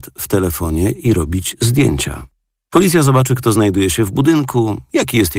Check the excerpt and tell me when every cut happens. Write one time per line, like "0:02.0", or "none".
none